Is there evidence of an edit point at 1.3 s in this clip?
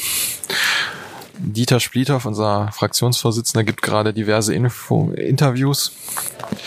yes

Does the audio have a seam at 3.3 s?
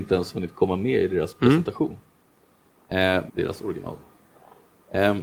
yes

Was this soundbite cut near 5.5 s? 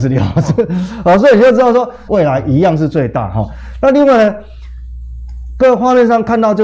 no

